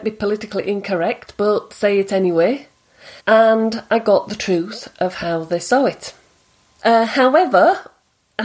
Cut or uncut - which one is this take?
cut